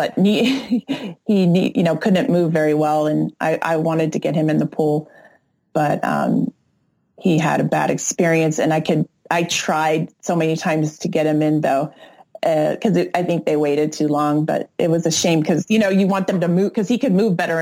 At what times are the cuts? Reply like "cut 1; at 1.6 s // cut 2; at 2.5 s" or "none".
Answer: cut 1; at 11.6 s